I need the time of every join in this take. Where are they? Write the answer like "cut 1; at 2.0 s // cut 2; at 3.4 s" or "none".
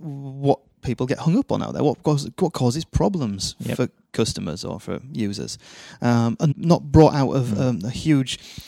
cut 1; at 6.5 s